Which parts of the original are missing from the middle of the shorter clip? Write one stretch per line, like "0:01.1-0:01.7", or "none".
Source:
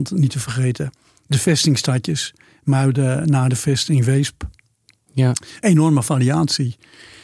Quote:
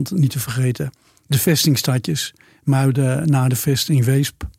none